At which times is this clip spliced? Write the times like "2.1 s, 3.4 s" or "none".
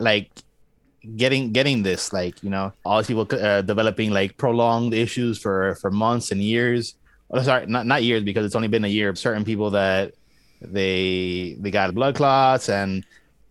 2.8 s, 9.1 s, 11.9 s

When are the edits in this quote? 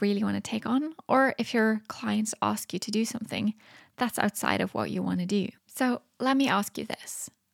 5.6 s

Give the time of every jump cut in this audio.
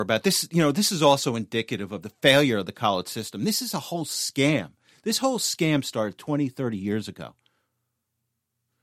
none

